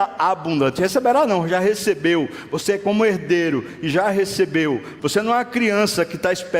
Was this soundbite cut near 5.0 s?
yes; 1 cut; at 5.0 s

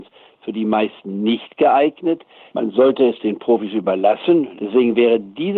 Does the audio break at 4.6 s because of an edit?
yes; 2 cuts; at 2.5 s, 4.6 s

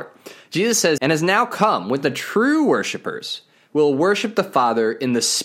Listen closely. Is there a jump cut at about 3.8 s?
no; 1 cut; at 1.0 s

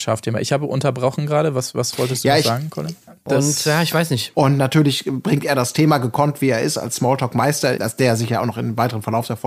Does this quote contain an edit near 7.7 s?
yes; 3 cuts; at 3.1 s, 4.3 s, 7.7 s

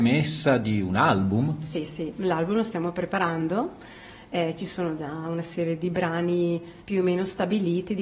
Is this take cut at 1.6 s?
no; 1 cut; at 6.8 s

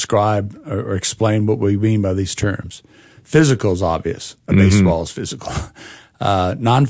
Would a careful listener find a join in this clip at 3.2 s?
no; 0 cuts

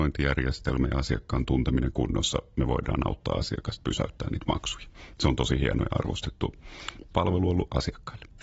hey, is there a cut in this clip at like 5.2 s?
no; 0 cuts

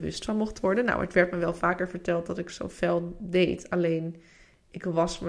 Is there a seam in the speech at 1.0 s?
no; 1 cut; at 2.5 s

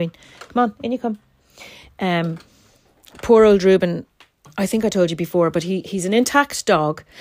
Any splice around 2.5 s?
no; 1 cut; at 5.8 s

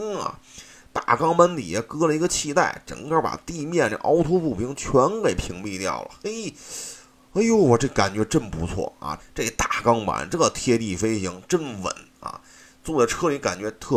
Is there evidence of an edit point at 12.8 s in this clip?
no; 1 cut; at 9.2 s

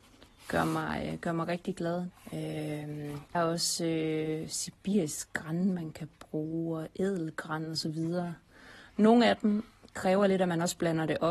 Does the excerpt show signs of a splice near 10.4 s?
no; 2 cuts; at 2.1 s, 3.3 s

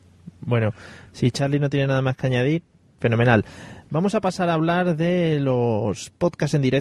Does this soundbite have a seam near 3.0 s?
yes; 1 cut; at 3.0 s

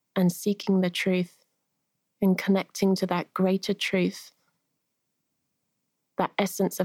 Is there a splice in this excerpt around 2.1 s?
no; 0 cuts

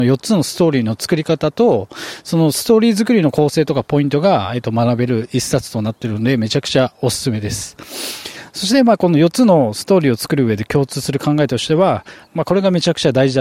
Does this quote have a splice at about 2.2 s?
no; 2 cuts; at 8.5 s, 12.3 s

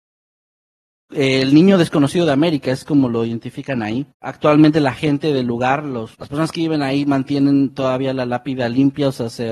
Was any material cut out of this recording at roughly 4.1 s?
yes; 2 cuts; at 4.1 s, 6.1 s

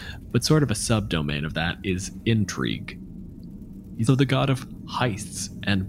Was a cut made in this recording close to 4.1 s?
yes; 1 cut; at 4.1 s

